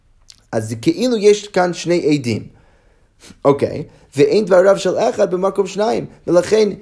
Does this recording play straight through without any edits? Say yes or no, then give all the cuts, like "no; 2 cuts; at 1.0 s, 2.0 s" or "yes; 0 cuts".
yes; 0 cuts